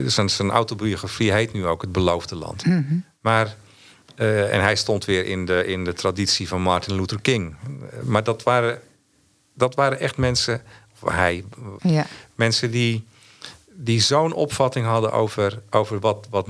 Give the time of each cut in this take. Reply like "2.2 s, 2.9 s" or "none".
11.8 s